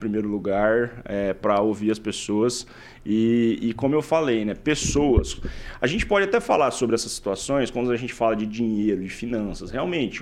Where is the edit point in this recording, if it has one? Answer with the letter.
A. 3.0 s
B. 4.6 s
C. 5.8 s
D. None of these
D